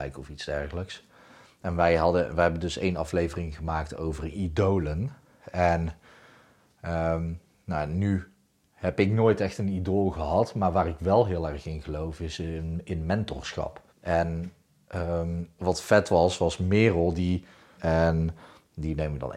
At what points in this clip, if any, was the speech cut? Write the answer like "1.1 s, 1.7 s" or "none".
13.9 s, 17.8 s